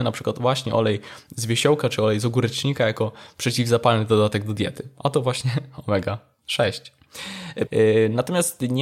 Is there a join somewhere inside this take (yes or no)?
yes